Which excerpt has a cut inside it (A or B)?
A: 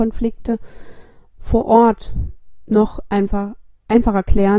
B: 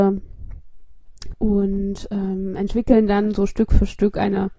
B